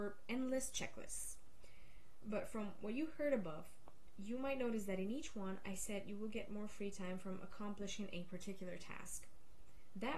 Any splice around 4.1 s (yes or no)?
no